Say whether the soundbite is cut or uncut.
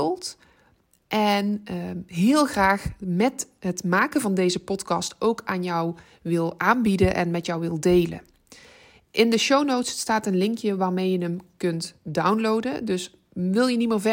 uncut